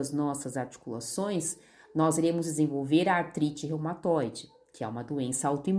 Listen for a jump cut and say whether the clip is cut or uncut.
uncut